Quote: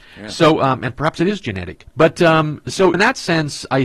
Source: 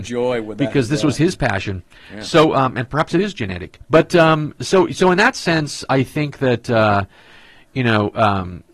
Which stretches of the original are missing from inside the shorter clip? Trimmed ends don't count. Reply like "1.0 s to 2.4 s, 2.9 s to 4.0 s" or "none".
4.9 s to 5.1 s